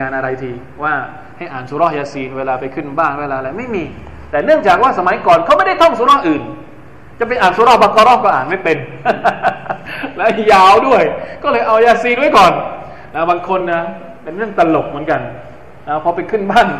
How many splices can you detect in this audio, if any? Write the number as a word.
zero